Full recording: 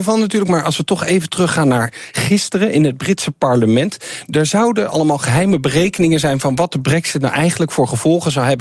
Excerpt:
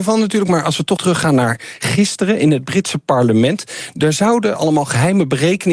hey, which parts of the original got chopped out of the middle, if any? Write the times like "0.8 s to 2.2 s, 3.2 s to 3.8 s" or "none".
1.0 s to 1.3 s